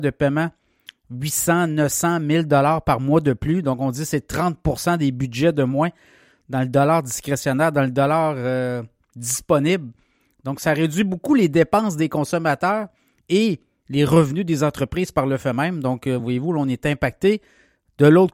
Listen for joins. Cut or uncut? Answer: uncut